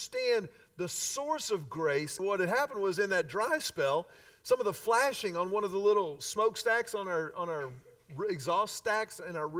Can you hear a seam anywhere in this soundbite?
yes; 1 cut; at 2.2 s

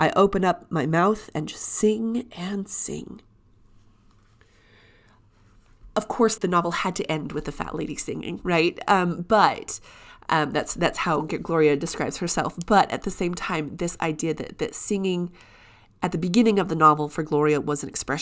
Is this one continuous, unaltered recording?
no; 1 cut; at 6.4 s

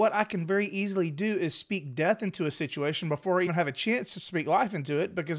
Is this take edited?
yes; 1 cut; at 3.5 s

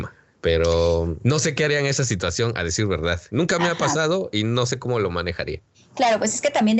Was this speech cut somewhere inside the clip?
yes; 1 cut; at 3.3 s

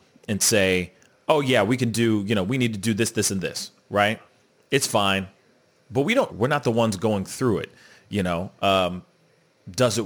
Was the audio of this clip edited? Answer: yes; 1 cut; at 6.3 s

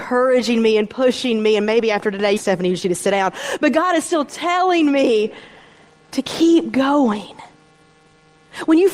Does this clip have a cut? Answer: yes; 1 cut; at 2.4 s

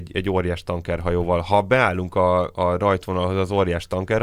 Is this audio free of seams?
yes; 0 cuts

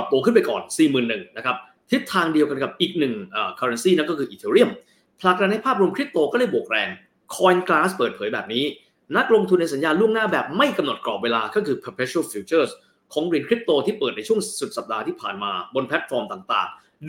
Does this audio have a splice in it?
no; 0 cuts

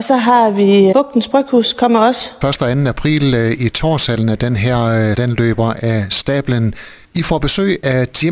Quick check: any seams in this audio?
yes; 3 cuts; at 0.9 s, 2.4 s, 5.1 s

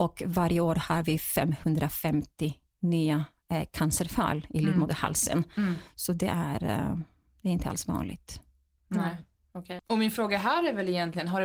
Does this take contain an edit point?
yes; 1 cut; at 9.8 s

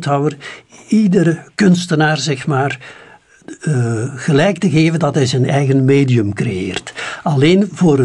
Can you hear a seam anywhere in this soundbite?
no; 0 cuts

